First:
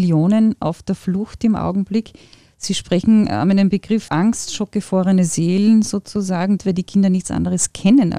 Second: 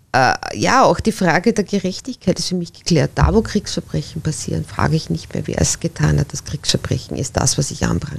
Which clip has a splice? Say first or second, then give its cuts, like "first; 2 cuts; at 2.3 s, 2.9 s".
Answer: first; 2 cuts; at 4.1 s, 6.6 s